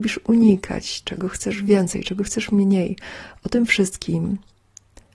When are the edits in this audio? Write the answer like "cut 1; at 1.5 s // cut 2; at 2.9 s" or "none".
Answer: none